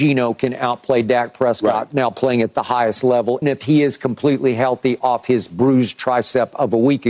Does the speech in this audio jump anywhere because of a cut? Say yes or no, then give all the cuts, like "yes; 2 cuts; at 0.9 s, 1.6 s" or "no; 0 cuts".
yes; 1 cut; at 3.4 s